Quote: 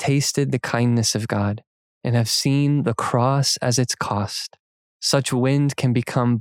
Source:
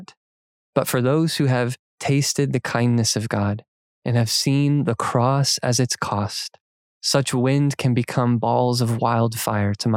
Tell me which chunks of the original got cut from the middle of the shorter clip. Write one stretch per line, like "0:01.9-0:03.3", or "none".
none